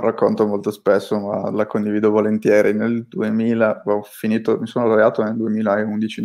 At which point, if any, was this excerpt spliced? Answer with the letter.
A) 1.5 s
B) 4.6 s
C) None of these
A